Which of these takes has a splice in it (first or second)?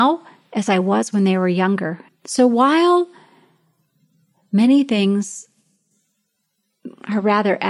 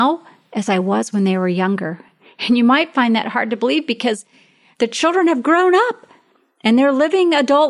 first